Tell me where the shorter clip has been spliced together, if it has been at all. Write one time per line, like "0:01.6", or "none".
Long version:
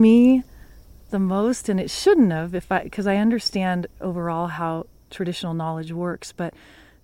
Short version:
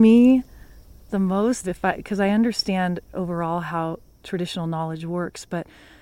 0:01.6